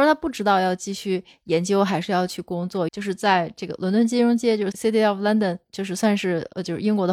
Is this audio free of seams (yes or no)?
no